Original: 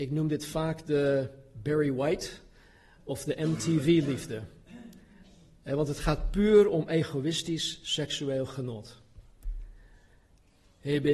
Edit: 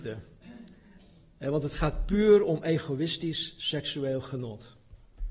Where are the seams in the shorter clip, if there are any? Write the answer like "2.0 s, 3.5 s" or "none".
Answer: none